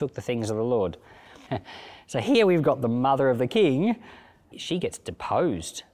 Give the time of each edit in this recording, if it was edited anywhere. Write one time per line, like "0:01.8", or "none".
0:01.5
0:04.5